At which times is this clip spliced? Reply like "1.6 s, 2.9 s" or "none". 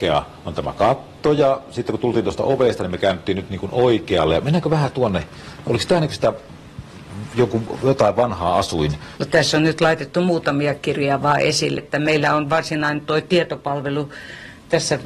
9.2 s, 11.8 s